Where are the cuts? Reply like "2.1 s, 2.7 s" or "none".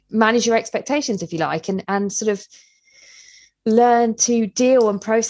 none